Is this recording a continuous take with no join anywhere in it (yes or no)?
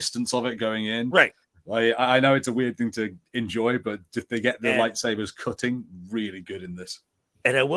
yes